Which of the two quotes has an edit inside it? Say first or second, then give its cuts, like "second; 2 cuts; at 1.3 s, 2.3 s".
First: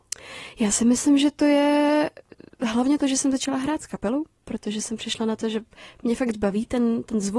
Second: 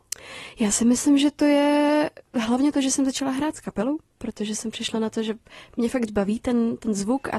second; 1 cut; at 2.3 s